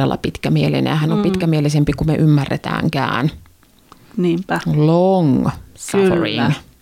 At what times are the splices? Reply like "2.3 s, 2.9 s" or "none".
none